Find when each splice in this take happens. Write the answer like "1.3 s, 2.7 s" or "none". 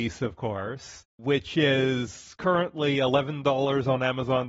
none